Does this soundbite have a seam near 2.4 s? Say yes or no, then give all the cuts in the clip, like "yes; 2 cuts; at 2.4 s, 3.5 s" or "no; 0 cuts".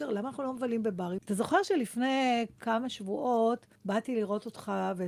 no; 2 cuts; at 1.2 s, 3.8 s